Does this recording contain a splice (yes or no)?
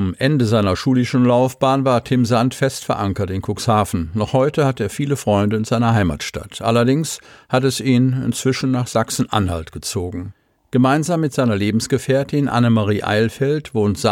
no